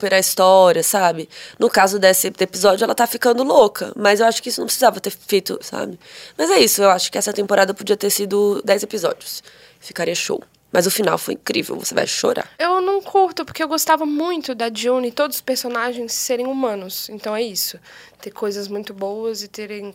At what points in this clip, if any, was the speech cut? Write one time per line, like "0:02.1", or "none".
0:05.6